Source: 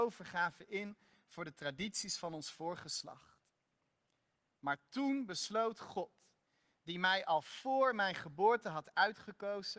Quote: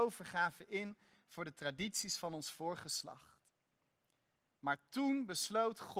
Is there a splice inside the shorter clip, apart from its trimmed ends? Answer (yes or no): no